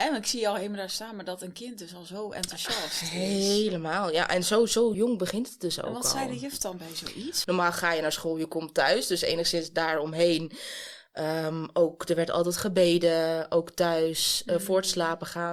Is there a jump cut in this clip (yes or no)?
yes